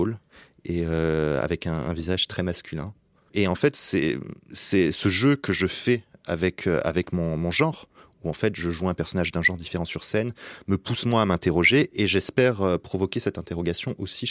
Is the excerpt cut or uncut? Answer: uncut